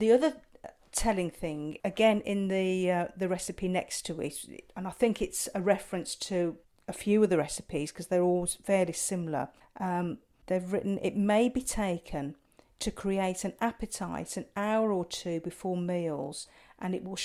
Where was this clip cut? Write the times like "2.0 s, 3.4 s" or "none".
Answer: 1.8 s